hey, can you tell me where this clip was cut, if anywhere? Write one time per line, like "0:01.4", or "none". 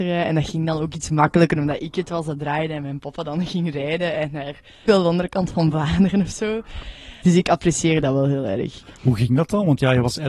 0:04.9
0:07.2